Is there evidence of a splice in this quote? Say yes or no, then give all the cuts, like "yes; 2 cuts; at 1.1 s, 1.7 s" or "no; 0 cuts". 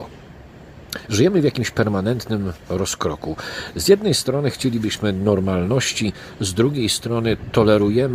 no; 0 cuts